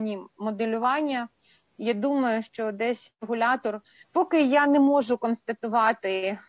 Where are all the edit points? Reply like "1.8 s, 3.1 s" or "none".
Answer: 4.0 s